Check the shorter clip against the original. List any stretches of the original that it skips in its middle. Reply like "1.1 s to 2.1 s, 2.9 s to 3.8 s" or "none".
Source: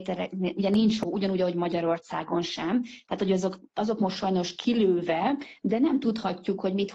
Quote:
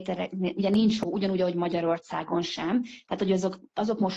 none